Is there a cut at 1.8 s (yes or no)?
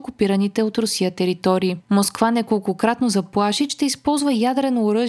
yes